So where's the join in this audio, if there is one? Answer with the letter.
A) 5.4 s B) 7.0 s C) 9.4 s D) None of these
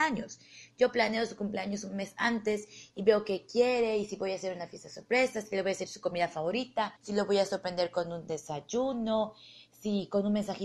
B